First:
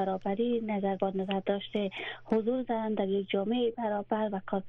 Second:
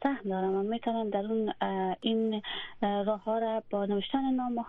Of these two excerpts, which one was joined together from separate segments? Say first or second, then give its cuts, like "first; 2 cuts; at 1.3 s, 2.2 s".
first; 1 cut; at 1.0 s